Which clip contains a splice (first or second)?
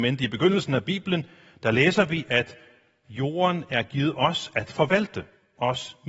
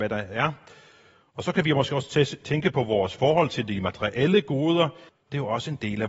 second